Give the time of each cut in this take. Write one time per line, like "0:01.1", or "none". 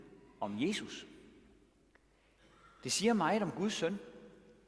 none